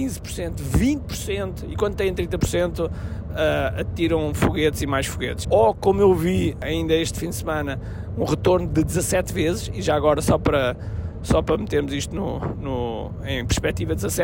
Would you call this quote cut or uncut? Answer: cut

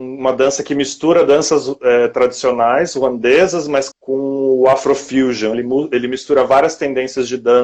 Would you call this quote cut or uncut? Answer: cut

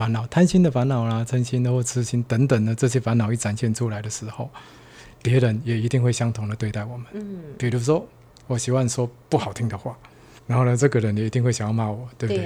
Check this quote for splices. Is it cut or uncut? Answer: cut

